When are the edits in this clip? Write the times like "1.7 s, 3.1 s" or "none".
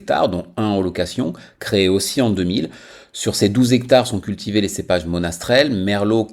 none

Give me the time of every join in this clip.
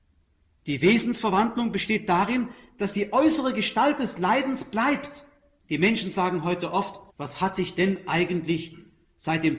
5.6 s, 7.1 s

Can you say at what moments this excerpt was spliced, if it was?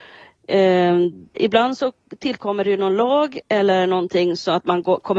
1.4 s

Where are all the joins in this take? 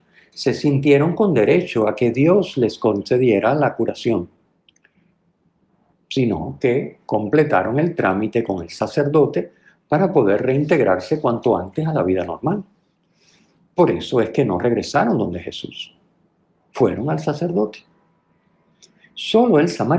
5.9 s

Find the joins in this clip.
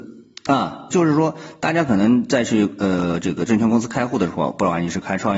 0.9 s

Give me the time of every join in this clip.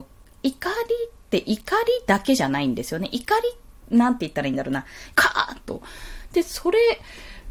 5.1 s

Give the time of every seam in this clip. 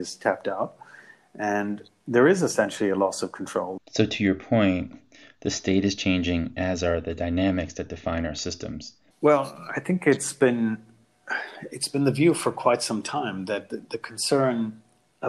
3.8 s, 9.1 s

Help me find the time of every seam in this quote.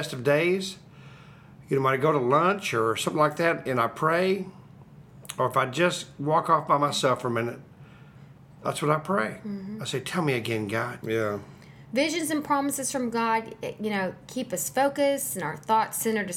11.0 s

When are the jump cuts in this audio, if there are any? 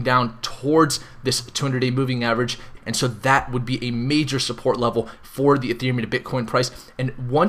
2.8 s

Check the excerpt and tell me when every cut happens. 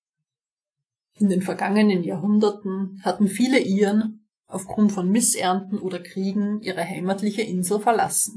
none

